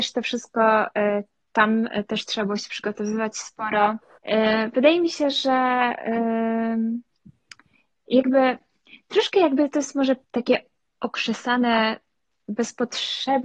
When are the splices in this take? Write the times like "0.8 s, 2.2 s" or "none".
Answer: 4.2 s, 10.2 s